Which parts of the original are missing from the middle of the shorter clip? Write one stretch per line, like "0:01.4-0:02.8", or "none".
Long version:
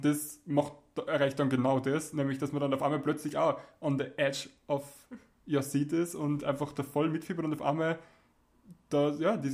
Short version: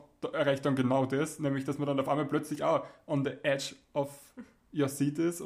none